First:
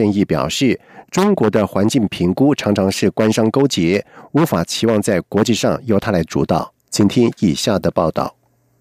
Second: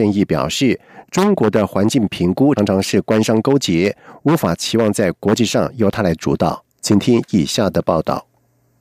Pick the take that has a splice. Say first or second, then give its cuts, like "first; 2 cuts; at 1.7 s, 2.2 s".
second; 1 cut; at 2.6 s